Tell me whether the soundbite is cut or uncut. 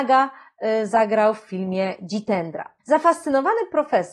cut